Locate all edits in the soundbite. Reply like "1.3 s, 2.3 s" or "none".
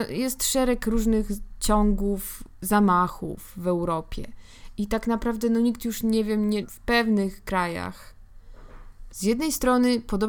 6.6 s, 9.1 s